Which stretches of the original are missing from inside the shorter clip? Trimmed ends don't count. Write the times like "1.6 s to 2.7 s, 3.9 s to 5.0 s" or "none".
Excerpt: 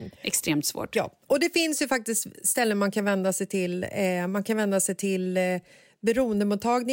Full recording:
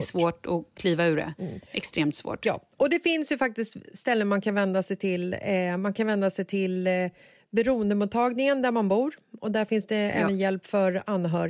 none